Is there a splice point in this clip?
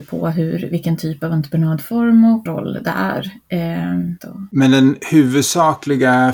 yes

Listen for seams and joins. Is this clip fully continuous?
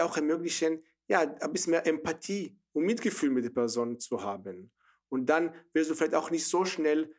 yes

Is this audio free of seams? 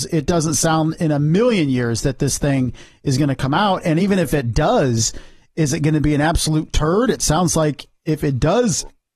yes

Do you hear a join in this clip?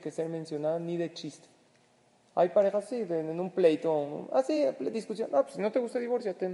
no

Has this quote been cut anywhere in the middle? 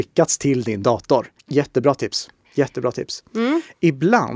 yes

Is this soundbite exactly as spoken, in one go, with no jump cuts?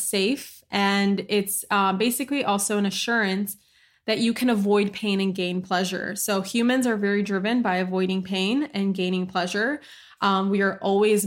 yes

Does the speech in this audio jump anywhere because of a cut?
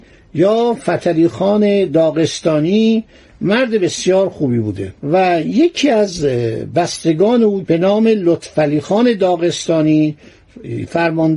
yes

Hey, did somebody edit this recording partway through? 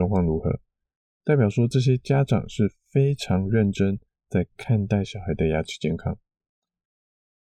no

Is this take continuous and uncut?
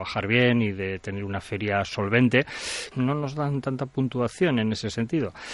no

